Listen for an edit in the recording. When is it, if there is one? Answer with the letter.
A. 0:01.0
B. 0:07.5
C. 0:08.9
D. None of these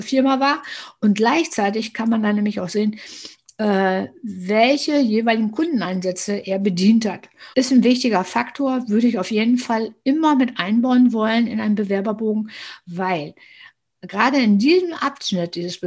B